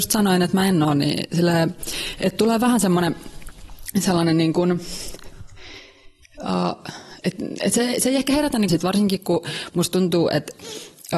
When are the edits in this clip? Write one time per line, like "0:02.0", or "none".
0:07.2
0:08.7